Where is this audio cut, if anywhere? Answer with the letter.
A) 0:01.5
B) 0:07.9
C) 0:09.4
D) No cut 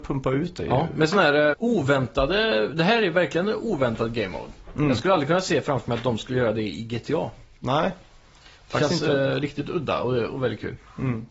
A